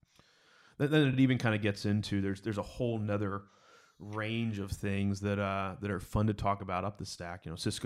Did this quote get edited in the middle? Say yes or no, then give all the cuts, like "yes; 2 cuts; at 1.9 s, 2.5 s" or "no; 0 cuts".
no; 0 cuts